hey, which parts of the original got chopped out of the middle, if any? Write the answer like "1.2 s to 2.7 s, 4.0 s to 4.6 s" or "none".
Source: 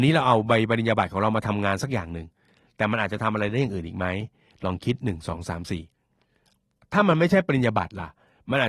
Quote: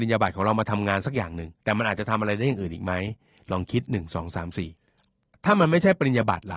2.4 s to 2.7 s, 5.9 s to 6.2 s

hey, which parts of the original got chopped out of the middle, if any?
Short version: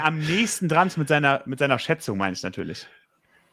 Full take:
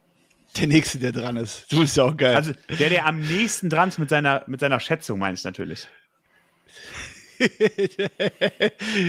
none

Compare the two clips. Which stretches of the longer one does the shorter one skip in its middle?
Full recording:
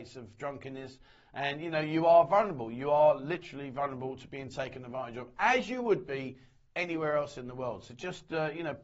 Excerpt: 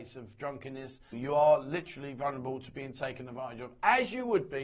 1.1 s to 2.7 s

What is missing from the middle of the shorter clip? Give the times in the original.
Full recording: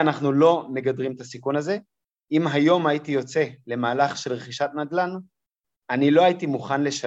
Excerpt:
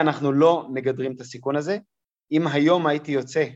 none

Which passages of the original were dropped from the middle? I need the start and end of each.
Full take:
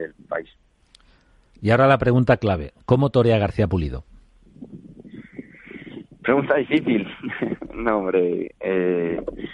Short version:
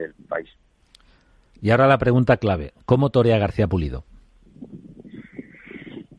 none

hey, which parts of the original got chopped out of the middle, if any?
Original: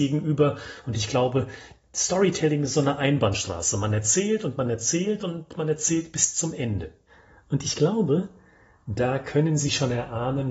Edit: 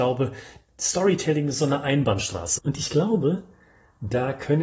3.7 s to 7.4 s

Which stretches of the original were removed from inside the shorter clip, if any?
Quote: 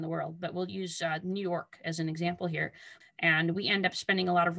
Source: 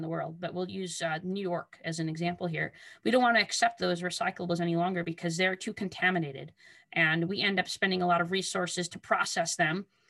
3.0 s to 6.7 s

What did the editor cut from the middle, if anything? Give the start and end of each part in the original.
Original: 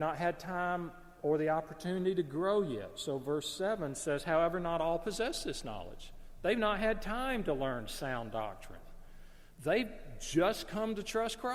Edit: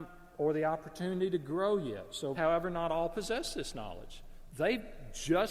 3.2 s to 4.2 s, 6.4 s to 9.5 s

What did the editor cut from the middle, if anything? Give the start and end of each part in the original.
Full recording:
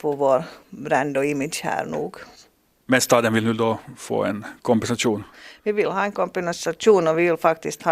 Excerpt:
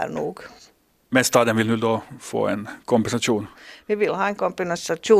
none

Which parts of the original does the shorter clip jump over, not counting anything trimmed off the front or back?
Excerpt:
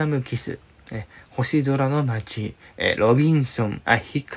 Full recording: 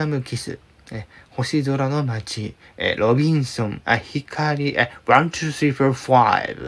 none

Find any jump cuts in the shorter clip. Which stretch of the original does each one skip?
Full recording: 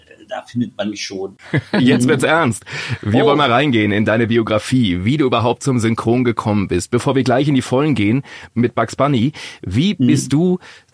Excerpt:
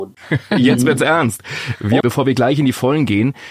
3.2 s to 6.9 s

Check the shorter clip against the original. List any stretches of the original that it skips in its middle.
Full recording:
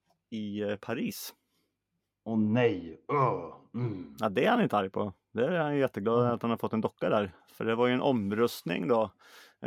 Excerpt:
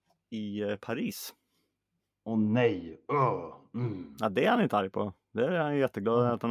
none

